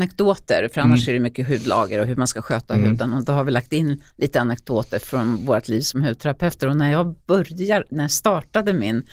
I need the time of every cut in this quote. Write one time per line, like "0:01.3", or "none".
none